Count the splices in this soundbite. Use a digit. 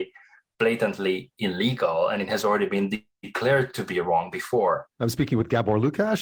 1